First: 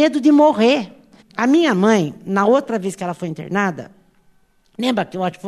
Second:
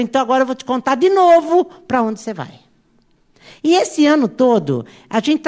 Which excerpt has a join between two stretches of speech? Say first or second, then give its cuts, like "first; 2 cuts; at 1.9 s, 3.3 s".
first; 1 cut; at 1.2 s